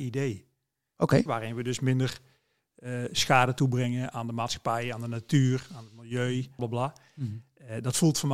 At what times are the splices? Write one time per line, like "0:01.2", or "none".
0:01.3
0:06.6